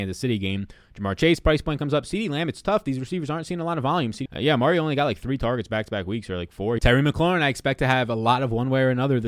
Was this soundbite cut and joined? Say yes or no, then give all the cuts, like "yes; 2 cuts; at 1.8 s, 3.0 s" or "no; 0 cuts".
yes; 2 cuts; at 4.3 s, 6.8 s